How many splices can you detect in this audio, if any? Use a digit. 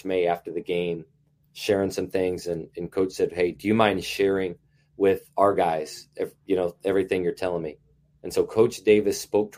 0